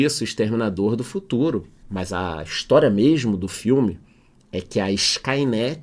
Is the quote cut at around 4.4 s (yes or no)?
no